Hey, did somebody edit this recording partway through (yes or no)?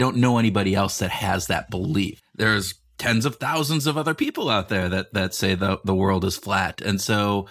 yes